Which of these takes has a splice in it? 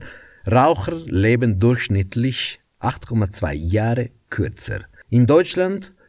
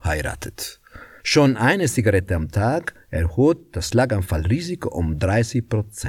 second; 1 cut; at 1.2 s

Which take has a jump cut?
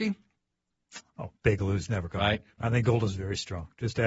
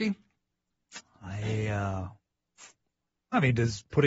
first; 2 cuts; at 1.1 s, 2.5 s

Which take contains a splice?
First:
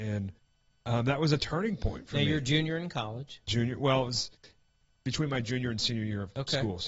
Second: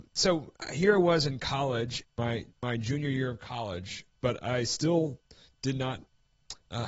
second; 1 cut; at 2.0 s

